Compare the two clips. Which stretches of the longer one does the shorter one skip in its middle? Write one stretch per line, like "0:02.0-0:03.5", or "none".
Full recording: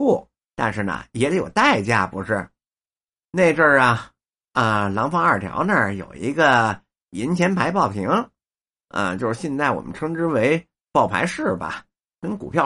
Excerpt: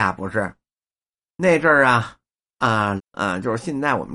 0:04.9-0:08.7